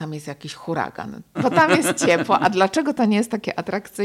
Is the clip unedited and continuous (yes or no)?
no